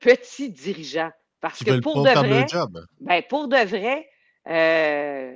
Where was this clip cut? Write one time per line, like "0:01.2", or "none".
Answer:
none